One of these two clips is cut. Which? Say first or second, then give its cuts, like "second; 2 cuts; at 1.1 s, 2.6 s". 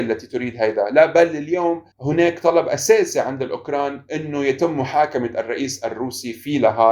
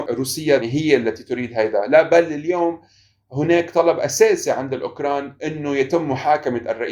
first; 1 cut; at 1.9 s